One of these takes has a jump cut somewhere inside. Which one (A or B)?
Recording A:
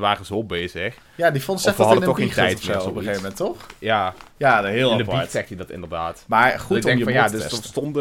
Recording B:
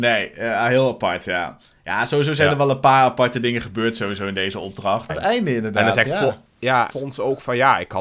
B